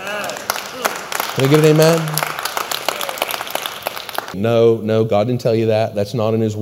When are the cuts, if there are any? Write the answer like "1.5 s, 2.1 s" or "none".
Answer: 4.3 s